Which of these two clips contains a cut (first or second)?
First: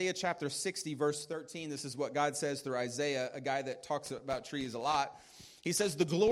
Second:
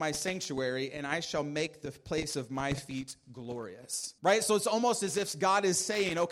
second